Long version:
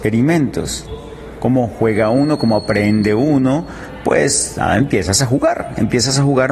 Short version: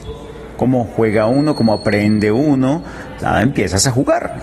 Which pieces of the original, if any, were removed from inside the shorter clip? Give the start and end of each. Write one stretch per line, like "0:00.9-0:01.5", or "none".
0:04.0-0:04.5